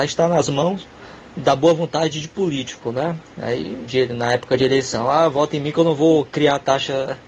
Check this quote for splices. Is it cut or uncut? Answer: cut